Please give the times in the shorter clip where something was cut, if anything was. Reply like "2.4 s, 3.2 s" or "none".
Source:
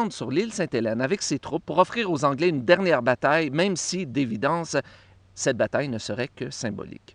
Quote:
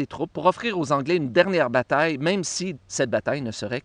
2.7 s